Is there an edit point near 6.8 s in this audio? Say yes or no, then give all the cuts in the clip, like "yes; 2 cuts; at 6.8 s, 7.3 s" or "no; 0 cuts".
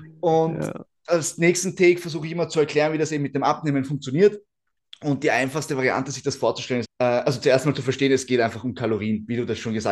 yes; 1 cut; at 6.8 s